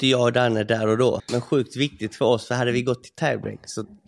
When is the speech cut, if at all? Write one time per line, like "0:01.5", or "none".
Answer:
0:01.2